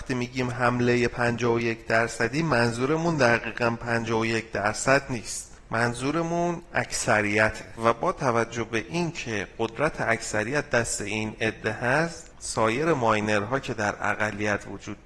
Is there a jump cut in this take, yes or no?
yes